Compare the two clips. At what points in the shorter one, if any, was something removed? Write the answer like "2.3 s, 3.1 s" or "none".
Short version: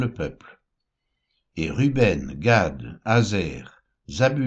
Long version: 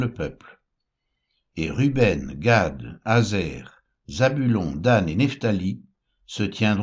none